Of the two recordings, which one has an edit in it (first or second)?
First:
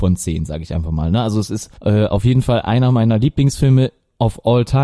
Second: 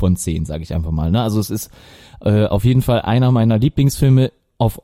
first